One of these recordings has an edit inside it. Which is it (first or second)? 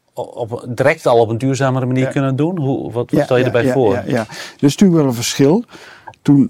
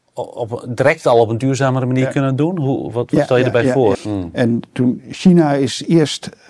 second